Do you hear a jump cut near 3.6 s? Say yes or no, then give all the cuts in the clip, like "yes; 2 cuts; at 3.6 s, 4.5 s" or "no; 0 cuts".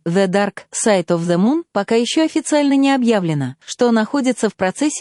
yes; 1 cut; at 3.6 s